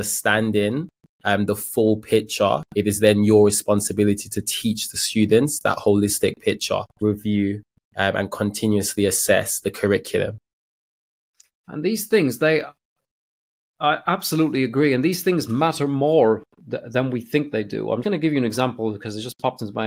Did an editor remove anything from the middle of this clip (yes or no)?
yes